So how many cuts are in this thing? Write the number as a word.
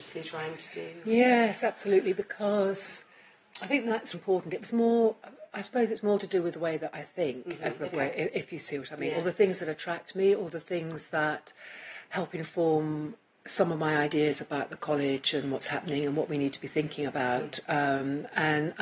one